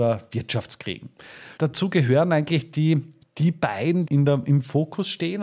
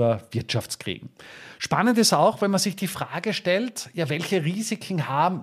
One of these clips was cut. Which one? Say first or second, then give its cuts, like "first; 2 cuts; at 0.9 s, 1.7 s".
first; 2 cuts; at 1.6 s, 4.1 s